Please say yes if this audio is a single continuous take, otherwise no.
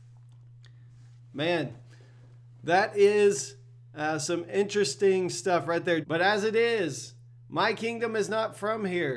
no